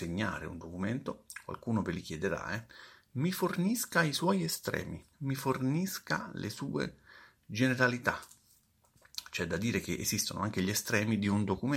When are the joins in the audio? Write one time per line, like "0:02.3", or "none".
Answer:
0:05.1